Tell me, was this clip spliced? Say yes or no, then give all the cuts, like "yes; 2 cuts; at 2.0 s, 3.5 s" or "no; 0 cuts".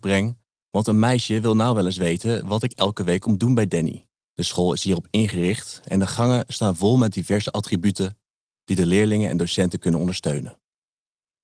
yes; 1 cut; at 4.3 s